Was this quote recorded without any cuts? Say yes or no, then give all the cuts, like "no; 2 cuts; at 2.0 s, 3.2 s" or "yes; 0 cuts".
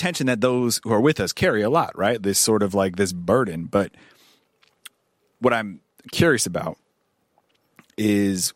yes; 0 cuts